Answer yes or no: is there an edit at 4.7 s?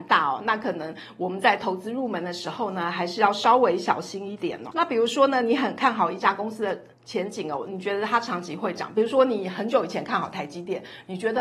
no